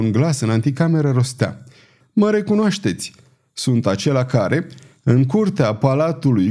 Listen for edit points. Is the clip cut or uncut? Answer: cut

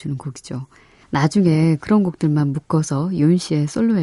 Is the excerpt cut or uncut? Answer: cut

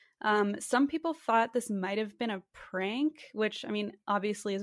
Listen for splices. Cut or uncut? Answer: uncut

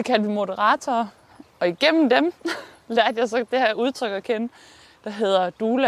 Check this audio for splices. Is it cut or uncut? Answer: cut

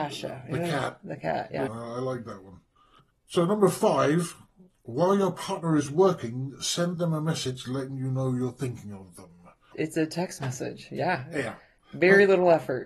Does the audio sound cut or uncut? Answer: cut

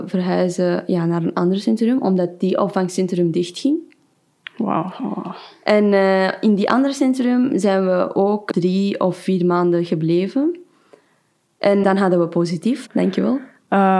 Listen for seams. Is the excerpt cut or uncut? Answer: cut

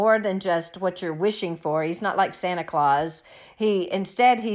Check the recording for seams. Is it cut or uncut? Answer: uncut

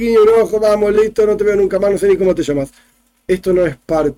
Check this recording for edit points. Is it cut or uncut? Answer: uncut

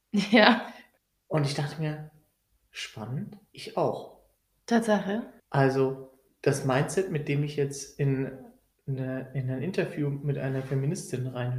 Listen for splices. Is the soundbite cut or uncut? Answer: cut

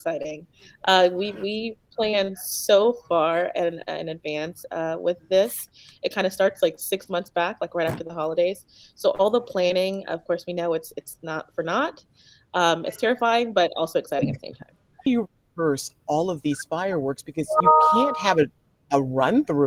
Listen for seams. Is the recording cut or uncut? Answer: uncut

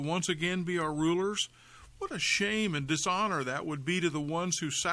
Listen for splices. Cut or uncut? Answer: uncut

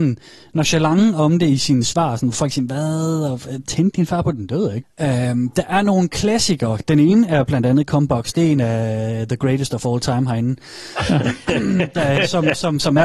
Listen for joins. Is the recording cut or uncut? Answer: cut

